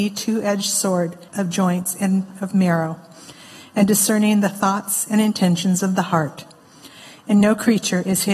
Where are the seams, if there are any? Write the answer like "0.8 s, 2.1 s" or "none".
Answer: 1.3 s